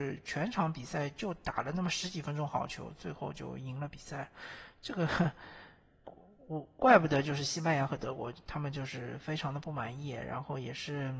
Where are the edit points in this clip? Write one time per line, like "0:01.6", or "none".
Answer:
none